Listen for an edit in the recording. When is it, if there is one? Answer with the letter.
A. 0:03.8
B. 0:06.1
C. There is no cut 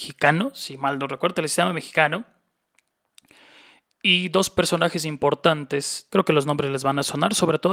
B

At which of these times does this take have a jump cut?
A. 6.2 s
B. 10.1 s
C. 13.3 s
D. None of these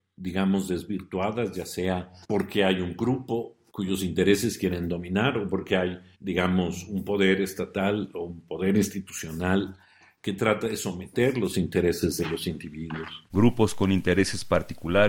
C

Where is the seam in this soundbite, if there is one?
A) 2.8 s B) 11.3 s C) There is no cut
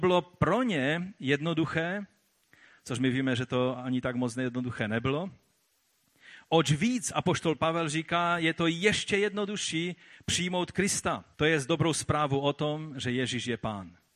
B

